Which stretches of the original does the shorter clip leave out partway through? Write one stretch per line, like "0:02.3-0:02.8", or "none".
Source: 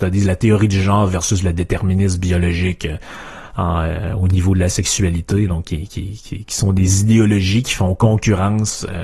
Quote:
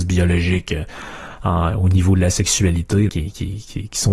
0:03.8-0:04.1
0:05.5-0:05.6